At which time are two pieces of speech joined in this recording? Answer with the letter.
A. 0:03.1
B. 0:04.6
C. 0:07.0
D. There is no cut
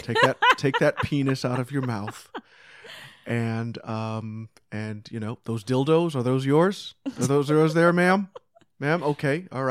D